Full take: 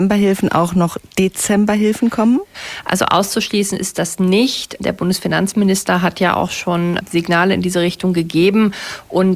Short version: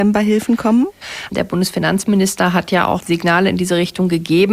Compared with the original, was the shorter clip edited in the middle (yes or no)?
yes